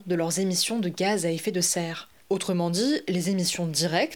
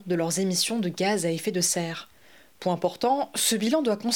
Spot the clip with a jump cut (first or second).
first